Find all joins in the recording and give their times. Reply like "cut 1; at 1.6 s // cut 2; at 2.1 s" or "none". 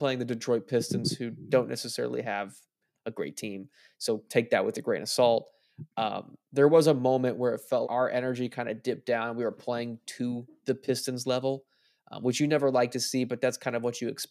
cut 1; at 7.8 s